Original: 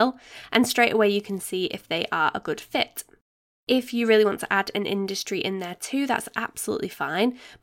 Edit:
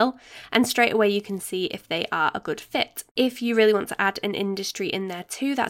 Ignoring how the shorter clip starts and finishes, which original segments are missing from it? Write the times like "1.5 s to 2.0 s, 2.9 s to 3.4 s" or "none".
3.1 s to 3.6 s